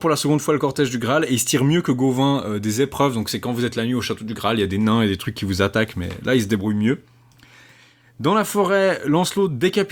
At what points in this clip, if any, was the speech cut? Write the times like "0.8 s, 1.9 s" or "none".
none